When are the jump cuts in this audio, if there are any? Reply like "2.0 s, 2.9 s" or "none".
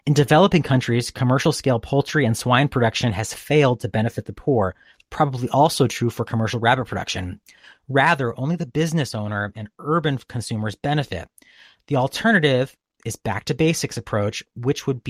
none